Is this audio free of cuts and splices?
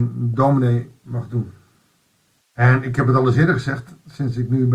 no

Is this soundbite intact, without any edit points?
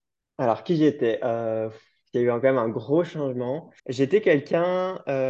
no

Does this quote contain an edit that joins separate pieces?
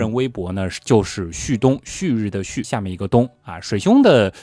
yes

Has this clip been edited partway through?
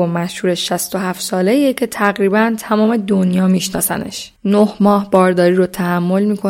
yes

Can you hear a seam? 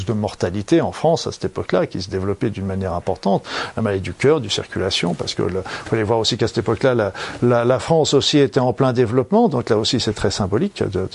no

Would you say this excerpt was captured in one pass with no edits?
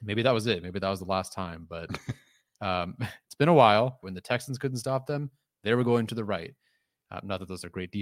no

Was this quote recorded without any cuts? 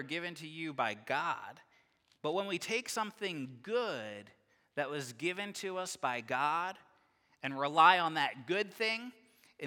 yes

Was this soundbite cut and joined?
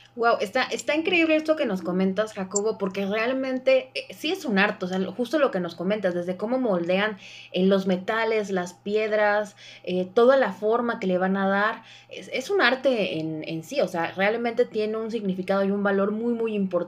no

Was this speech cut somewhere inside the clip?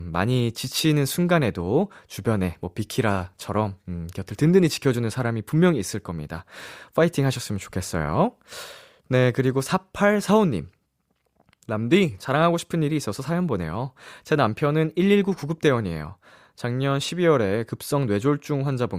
no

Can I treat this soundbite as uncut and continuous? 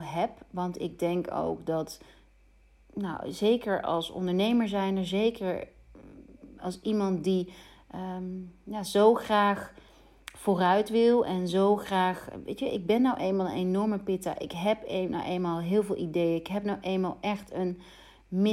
yes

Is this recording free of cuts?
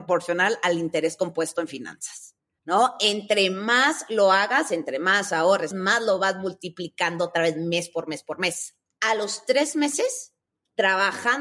no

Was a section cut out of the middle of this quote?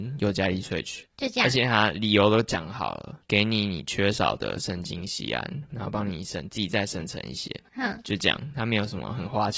no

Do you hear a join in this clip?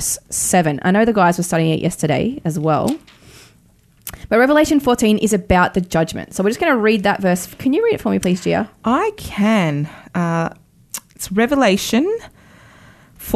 no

